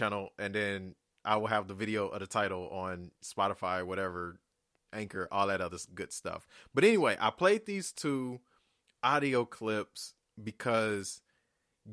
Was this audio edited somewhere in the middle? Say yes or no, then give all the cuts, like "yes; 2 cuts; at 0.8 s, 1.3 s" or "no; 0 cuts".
no; 0 cuts